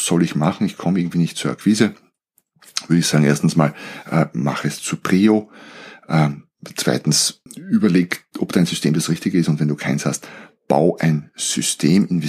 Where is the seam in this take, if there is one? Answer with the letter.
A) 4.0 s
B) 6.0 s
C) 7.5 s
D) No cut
C